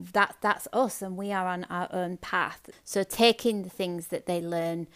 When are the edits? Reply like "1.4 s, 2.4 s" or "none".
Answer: 2.7 s